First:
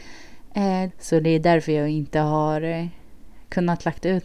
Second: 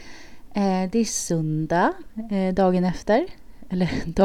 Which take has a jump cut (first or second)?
first